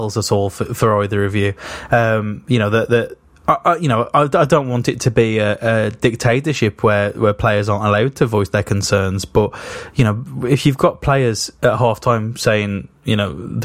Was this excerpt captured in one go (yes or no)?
yes